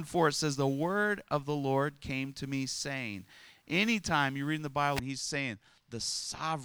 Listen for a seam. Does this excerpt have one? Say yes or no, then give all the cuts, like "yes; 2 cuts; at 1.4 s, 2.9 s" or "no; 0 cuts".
yes; 1 cut; at 5.0 s